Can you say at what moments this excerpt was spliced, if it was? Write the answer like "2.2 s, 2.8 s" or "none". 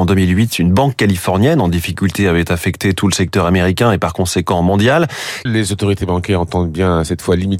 5.5 s

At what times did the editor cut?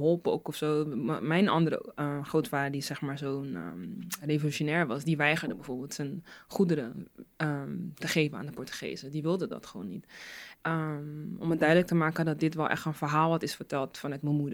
10.6 s

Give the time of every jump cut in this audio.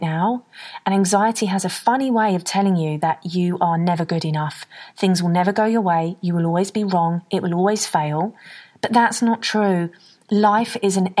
none

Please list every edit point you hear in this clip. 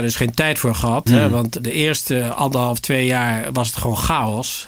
none

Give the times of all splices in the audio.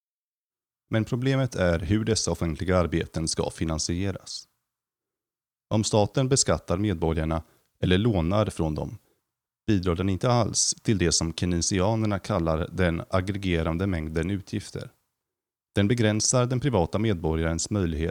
none

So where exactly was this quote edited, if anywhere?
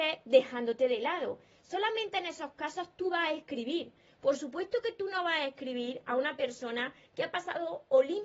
none

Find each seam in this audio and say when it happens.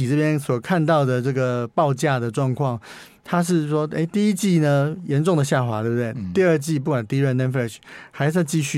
none

